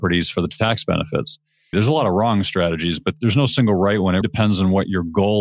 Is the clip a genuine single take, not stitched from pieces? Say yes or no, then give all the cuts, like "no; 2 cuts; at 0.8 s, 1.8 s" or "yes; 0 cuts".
no; 2 cuts; at 1.7 s, 4.2 s